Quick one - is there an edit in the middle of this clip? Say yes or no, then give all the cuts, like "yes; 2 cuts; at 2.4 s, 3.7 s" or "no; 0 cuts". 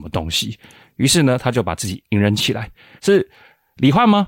yes; 1 cut; at 3.0 s